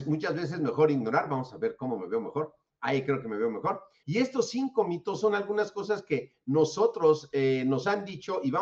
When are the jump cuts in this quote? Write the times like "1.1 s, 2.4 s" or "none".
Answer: 4.0 s